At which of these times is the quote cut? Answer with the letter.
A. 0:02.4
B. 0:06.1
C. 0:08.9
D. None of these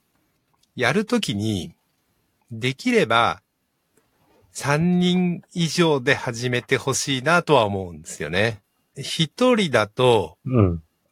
C